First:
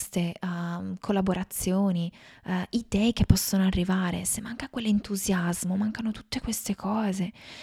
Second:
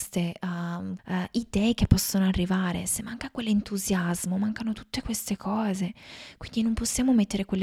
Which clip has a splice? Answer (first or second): second